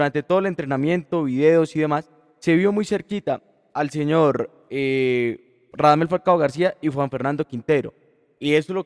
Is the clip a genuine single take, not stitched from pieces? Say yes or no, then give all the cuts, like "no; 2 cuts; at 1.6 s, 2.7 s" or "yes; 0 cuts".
yes; 0 cuts